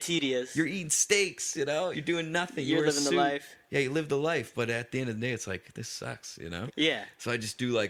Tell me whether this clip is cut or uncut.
cut